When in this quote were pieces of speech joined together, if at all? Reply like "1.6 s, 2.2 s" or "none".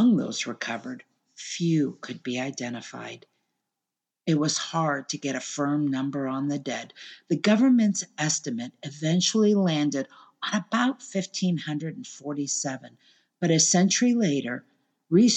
none